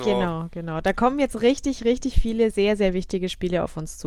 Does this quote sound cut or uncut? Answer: uncut